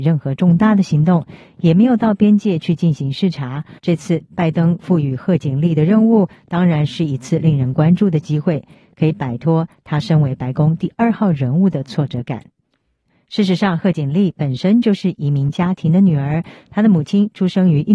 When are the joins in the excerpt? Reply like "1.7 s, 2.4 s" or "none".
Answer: 3.8 s